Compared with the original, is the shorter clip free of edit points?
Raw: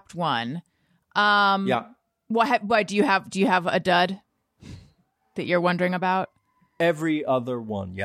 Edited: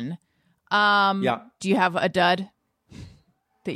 no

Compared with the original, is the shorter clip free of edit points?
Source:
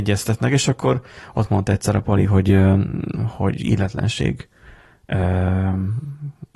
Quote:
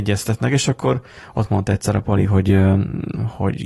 yes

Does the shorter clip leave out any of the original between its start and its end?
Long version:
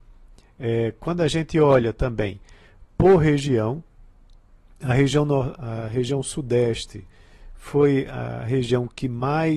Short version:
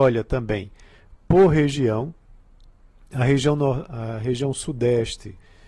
no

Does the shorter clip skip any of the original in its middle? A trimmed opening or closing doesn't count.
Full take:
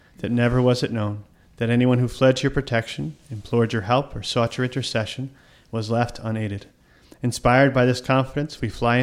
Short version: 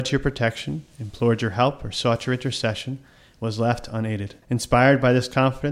yes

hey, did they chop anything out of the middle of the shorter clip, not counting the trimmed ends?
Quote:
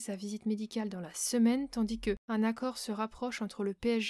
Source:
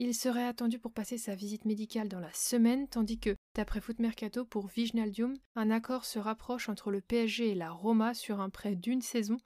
yes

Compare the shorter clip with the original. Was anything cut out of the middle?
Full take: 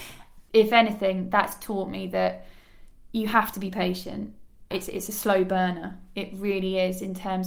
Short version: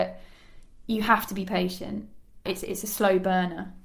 no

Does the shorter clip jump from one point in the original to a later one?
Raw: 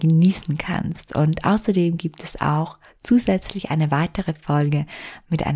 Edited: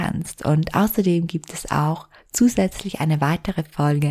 no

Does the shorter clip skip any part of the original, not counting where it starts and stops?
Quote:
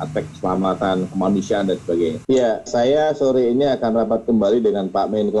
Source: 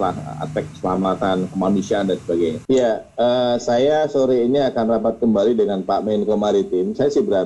yes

